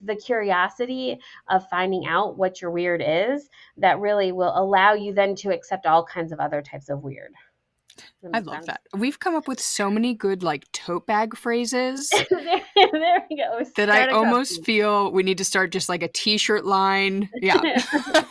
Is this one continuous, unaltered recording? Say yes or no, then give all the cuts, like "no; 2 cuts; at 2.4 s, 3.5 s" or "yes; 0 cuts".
yes; 0 cuts